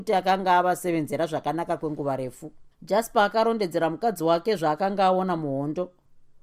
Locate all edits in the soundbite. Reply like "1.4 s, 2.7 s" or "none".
2.7 s